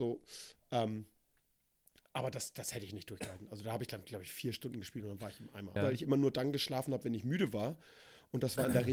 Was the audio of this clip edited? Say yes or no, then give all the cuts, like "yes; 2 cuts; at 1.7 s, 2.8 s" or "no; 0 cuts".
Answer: yes; 1 cut; at 5.8 s